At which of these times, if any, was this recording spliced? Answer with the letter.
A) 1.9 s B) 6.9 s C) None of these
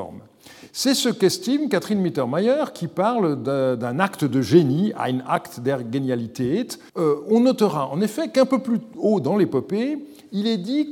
B